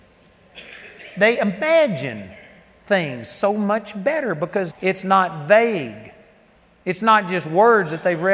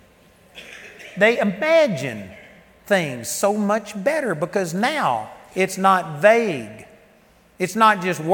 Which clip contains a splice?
first; 1 cut; at 4.7 s

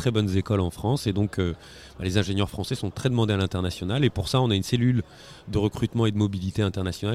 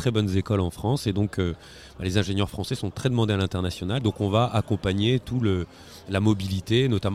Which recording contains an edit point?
second; 1 cut; at 4.0 s

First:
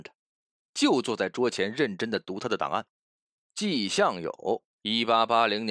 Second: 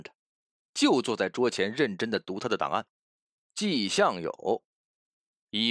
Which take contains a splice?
first; 1 cut; at 4.7 s

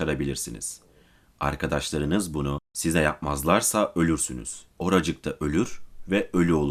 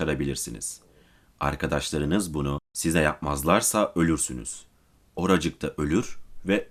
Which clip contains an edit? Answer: first; 1 cut; at 4.7 s

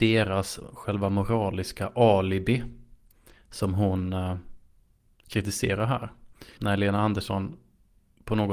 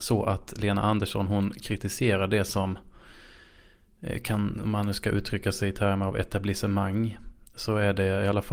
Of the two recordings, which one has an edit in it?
first; 1 cut; at 6.6 s

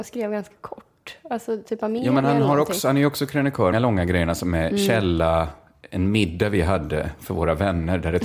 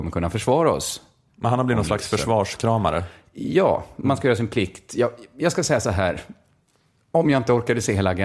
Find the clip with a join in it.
first; 1 cut; at 3.7 s

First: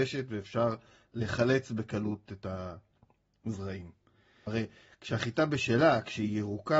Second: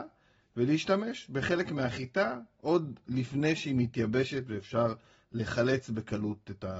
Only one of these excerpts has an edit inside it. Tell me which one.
first; 1 cut; at 4.5 s

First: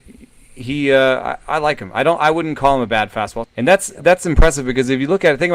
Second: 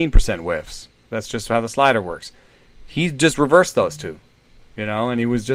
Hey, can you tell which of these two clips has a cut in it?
first; 1 cut; at 3.4 s

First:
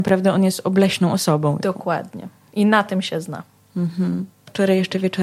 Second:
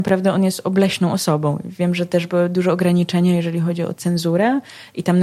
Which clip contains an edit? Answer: first; 1 cut; at 1.6 s

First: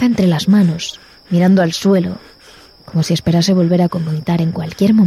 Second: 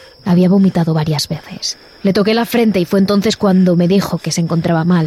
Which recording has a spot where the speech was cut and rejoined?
second; 1 cut; at 2.0 s

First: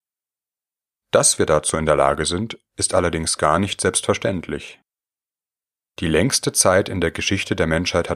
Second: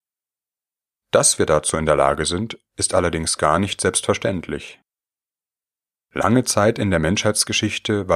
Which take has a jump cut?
first; 1 cut; at 5.9 s

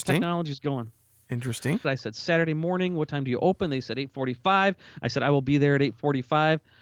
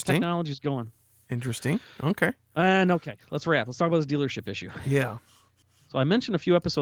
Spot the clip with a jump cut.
first; 1 cut; at 1.8 s

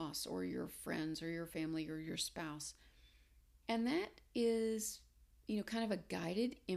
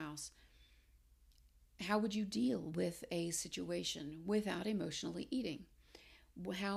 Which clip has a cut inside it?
first; 1 cut; at 3.6 s

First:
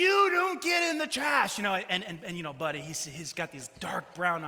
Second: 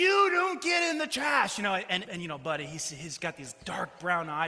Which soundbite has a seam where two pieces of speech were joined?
second; 1 cut; at 2.0 s

